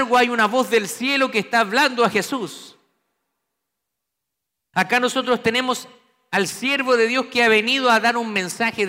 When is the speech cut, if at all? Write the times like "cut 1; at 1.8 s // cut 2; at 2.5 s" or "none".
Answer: cut 1; at 4.7 s